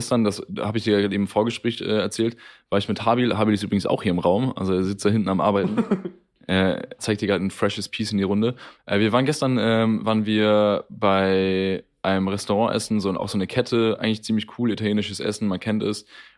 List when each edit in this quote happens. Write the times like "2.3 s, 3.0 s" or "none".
7.0 s